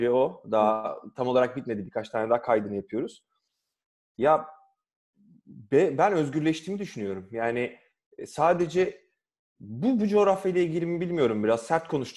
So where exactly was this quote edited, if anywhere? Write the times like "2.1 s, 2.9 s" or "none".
none